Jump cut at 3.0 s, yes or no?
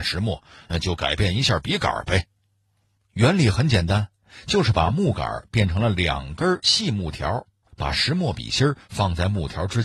yes